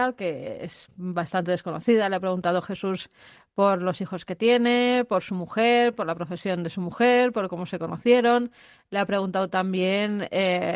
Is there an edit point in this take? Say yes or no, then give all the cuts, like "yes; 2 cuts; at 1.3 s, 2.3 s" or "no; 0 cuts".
no; 0 cuts